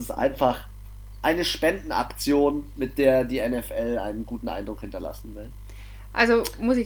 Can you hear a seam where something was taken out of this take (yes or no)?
no